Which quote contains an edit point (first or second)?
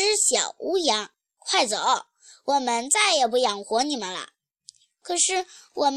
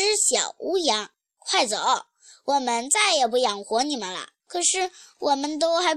second